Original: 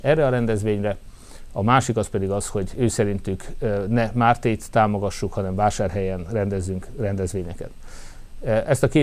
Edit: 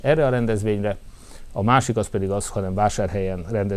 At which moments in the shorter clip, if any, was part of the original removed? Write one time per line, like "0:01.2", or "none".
0:02.5